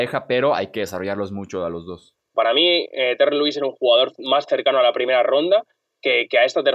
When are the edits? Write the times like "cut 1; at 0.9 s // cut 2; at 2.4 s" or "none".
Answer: cut 1; at 2.3 s